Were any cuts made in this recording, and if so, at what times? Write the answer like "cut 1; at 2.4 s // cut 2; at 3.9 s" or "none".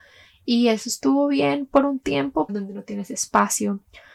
cut 1; at 2.5 s